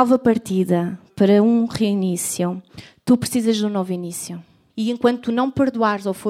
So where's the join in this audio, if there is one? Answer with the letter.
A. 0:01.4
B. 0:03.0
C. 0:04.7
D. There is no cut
C